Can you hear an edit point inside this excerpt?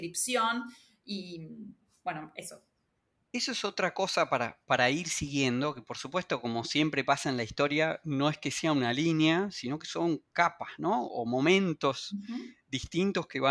no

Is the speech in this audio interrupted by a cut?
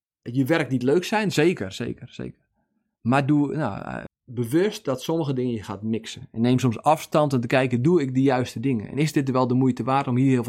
yes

